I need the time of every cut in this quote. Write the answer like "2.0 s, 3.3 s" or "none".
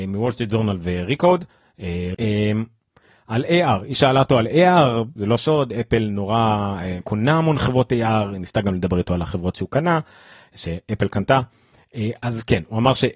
2.1 s, 5.2 s, 7.0 s